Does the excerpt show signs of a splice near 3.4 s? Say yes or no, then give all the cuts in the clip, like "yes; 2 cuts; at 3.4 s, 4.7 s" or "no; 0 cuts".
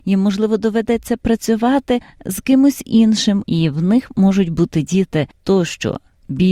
yes; 1 cut; at 3.4 s